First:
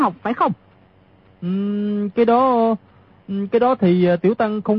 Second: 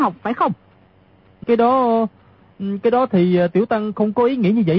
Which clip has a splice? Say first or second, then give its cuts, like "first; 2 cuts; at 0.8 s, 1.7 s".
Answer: second; 1 cut; at 1.4 s